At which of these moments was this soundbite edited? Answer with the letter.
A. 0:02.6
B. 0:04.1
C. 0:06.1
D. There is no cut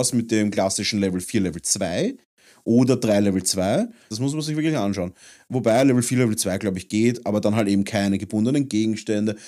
B